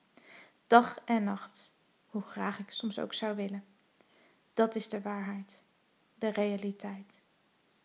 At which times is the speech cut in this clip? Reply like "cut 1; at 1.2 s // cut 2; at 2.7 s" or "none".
cut 1; at 2.0 s